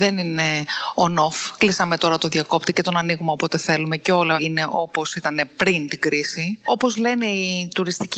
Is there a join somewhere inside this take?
no; 0 cuts

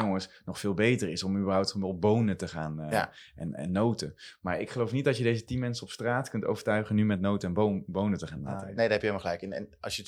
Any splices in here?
no; 0 cuts

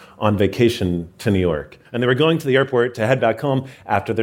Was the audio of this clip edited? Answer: yes; 1 cut; at 1.9 s

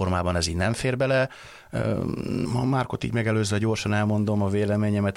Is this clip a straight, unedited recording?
no; 1 cut; at 2.5 s

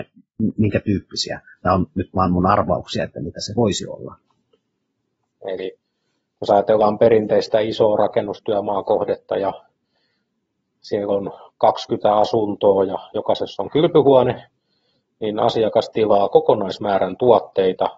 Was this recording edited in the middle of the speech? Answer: yes; 1 cut; at 5.3 s

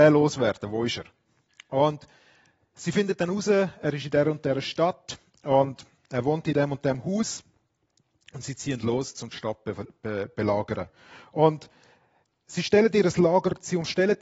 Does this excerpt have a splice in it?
no; 0 cuts

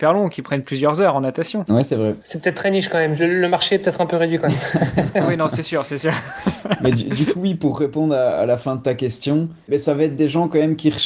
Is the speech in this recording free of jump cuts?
yes; 0 cuts

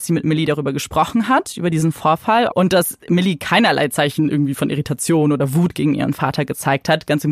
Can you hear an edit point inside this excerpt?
yes; 1 cut; at 2.5 s

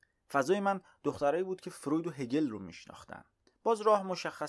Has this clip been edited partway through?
yes; 1 cut; at 3.5 s

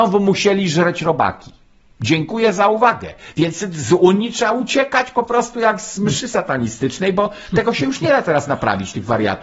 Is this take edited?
no; 0 cuts

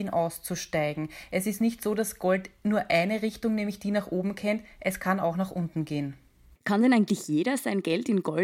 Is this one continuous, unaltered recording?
yes; 0 cuts

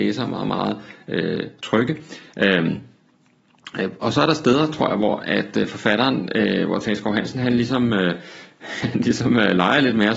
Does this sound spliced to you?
no; 0 cuts

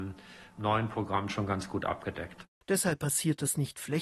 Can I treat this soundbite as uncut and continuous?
no; 1 cut; at 2.6 s

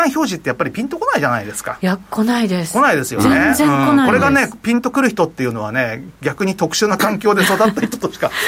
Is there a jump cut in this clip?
no; 0 cuts

